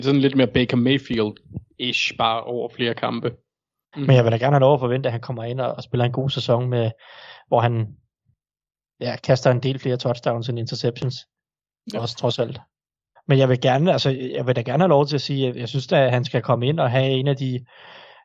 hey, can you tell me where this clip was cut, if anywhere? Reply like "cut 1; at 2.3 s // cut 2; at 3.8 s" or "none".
cut 1; at 3.9 s // cut 2; at 13.2 s

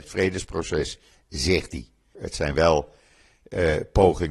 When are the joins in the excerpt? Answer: cut 1; at 2.1 s

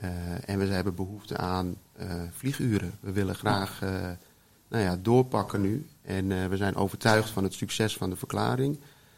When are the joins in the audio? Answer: none

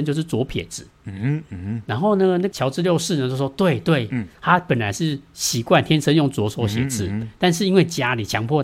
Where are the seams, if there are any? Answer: none

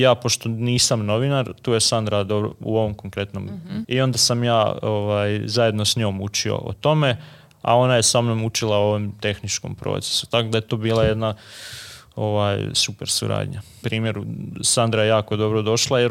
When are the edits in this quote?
cut 1; at 3.8 s // cut 2; at 13.8 s

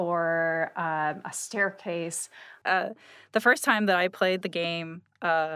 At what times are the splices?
cut 1; at 2.6 s

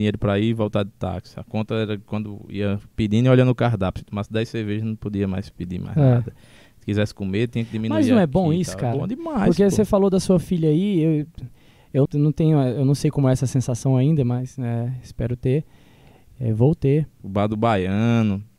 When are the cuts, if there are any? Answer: cut 1; at 12.1 s // cut 2; at 17.2 s

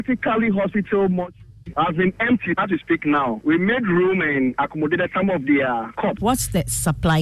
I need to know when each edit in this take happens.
cut 1; at 6.2 s

